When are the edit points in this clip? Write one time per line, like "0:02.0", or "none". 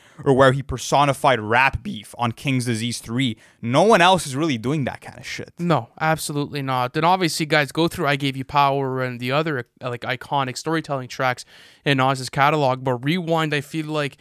none